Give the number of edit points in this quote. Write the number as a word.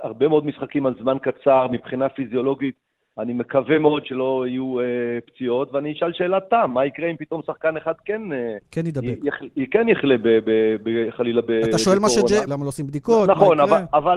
one